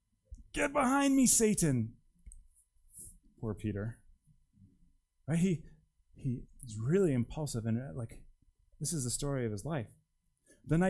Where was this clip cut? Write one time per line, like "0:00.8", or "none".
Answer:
0:06.4